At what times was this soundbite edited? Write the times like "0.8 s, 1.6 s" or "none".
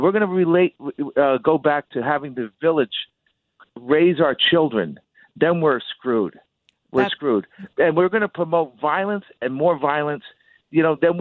none